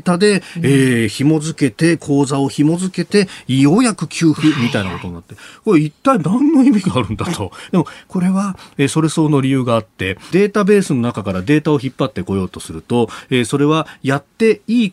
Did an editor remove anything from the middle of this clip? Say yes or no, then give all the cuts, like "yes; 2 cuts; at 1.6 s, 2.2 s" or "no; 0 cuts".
yes; 2 cuts; at 7.7 s, 10.3 s